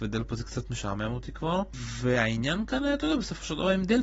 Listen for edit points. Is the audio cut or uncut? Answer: uncut